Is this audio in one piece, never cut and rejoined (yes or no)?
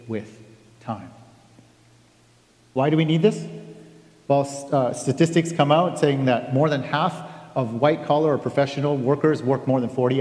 yes